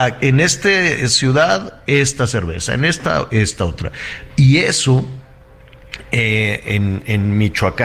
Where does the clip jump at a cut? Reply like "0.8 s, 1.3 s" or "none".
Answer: 4.3 s